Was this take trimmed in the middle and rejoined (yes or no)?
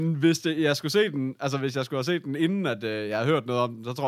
no